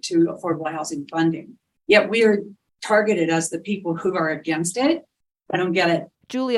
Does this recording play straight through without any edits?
yes; 0 cuts

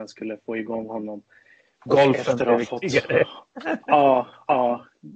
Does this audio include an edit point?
yes; 1 cut; at 1.8 s

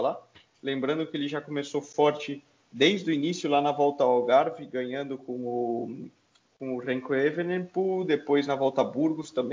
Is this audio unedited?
yes; 0 cuts

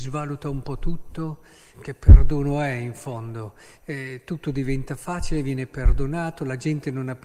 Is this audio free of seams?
no; 1 cut; at 1.7 s

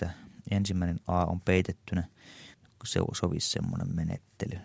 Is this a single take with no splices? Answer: no; 1 cut; at 2.5 s

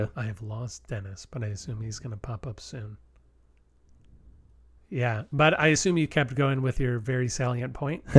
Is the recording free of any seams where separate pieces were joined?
no; 1 cut; at 4.8 s

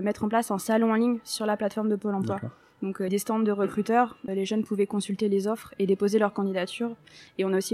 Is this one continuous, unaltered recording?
no; 2 cuts; at 3.1 s, 4.3 s

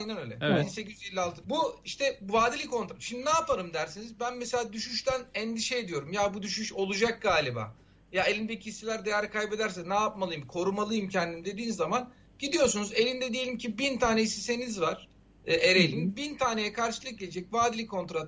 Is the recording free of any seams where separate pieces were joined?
no; 1 cut; at 1.4 s

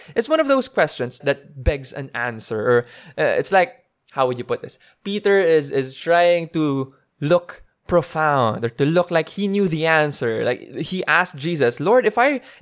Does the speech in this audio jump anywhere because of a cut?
yes; 1 cut; at 1.2 s

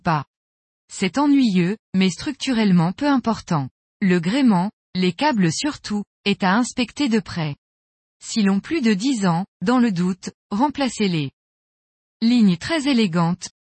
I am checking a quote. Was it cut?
yes; 2 cuts; at 1.8 s, 12.1 s

